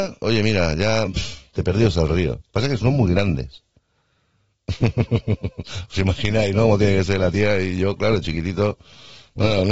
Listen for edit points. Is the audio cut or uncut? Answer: uncut